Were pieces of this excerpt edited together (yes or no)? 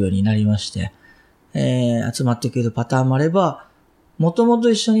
no